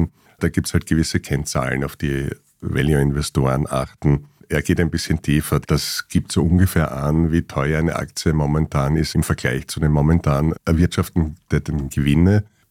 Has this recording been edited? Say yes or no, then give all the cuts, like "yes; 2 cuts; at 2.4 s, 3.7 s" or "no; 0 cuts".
yes; 1 cut; at 5.6 s